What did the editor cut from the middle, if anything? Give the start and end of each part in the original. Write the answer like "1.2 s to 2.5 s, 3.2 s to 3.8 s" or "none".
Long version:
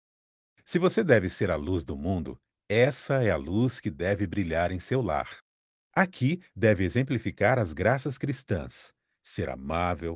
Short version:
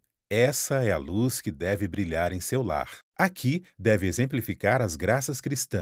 5.5 s to 5.8 s